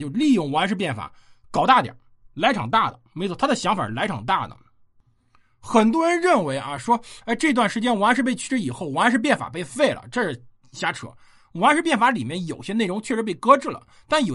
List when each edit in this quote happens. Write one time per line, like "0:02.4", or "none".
none